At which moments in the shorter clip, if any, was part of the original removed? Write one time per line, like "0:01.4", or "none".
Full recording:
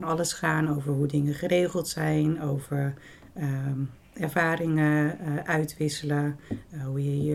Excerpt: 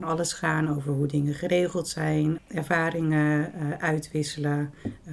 0:02.4

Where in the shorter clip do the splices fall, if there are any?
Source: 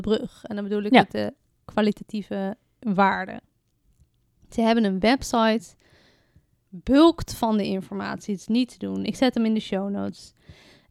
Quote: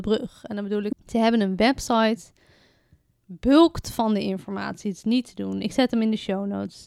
0:00.9

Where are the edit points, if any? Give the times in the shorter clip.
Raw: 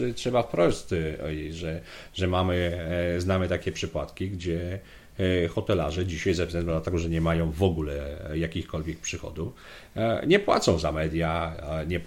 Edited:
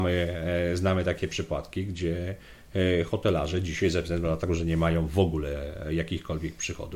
none

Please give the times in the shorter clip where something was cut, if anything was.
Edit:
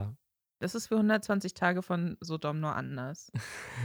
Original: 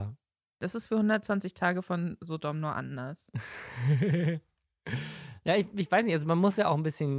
none

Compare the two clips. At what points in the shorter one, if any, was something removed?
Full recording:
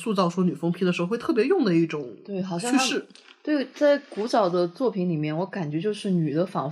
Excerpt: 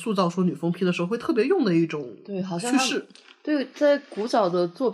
none

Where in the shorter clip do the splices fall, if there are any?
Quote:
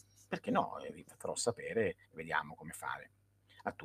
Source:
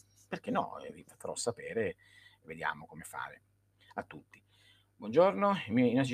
0:02.0

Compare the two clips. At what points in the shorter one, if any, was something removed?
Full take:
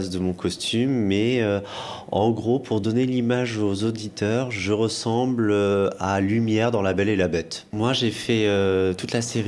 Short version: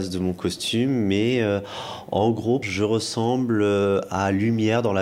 0:02.6

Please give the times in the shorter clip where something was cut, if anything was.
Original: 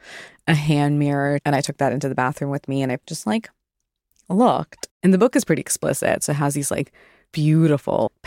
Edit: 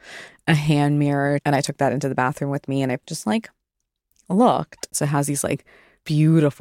0:04.9

